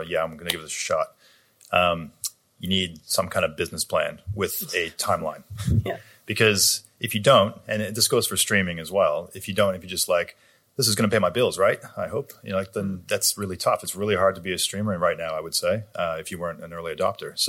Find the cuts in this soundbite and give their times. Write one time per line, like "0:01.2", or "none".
none